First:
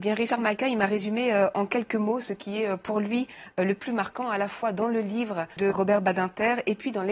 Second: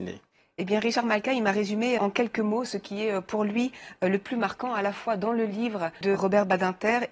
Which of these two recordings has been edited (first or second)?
second